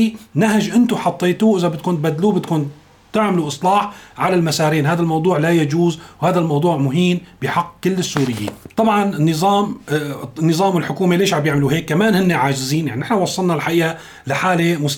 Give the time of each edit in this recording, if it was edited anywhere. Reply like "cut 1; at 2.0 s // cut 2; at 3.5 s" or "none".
none